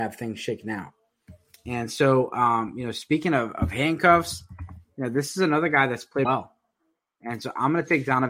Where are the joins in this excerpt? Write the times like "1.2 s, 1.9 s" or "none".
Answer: 6.3 s